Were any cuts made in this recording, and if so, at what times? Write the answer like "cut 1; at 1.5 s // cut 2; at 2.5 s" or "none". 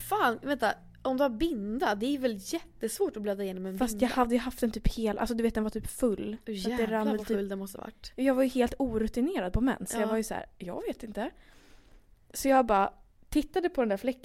none